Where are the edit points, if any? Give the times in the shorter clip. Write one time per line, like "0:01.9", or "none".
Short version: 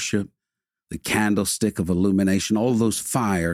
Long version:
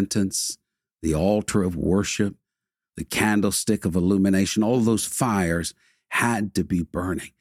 none